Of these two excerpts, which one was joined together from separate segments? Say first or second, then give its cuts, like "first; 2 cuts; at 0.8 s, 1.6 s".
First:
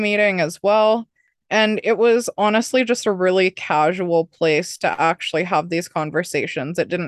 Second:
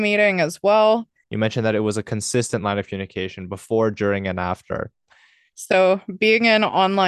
second; 2 cuts; at 1.2 s, 5.5 s